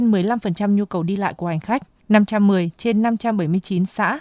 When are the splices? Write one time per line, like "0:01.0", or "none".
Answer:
0:02.0